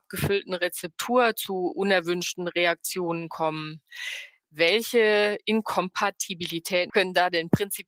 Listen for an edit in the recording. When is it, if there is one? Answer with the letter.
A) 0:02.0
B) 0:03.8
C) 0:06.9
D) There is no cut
C